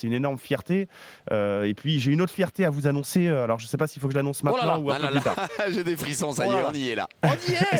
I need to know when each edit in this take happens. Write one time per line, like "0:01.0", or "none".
none